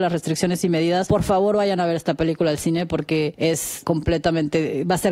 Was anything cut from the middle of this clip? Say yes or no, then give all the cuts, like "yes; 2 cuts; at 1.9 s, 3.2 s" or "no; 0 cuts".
no; 0 cuts